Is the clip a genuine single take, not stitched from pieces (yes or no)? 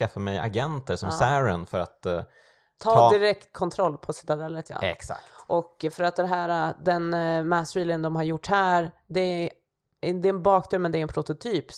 yes